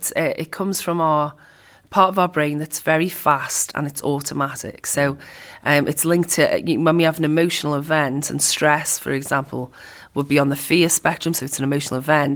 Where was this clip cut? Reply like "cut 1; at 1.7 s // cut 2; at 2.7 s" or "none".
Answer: none